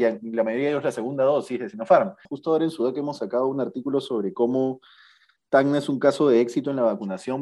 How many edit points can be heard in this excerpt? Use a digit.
1